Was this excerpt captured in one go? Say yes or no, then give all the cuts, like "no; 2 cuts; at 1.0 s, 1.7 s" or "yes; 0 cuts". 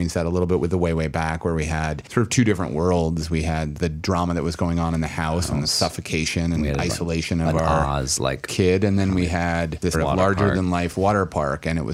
yes; 0 cuts